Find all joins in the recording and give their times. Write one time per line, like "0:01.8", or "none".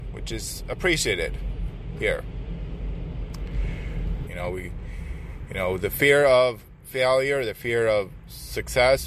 0:04.3